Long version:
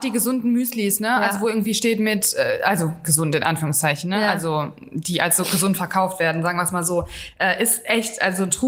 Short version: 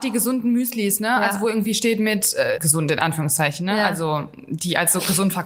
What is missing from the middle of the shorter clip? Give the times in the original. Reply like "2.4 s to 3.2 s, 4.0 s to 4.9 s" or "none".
2.6 s to 3.0 s

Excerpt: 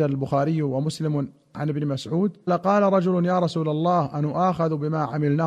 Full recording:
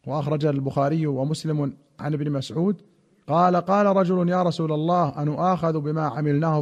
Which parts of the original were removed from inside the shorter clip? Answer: 2.9 s to 3.5 s

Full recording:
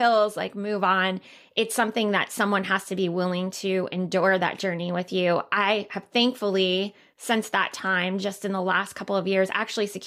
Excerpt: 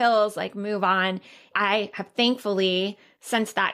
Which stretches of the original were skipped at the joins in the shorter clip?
1.5 s to 5.5 s

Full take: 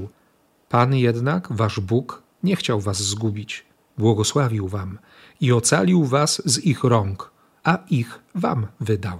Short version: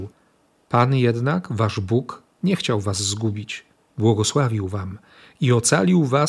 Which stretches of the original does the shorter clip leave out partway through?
none

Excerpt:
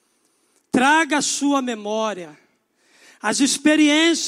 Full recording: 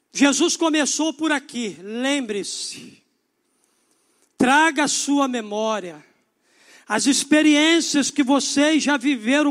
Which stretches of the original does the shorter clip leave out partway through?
none

